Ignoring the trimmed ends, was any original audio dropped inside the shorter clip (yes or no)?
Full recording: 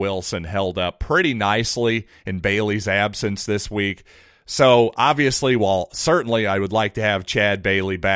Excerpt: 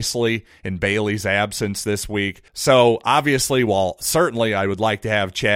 yes